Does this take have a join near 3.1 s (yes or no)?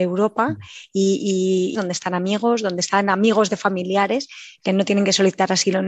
no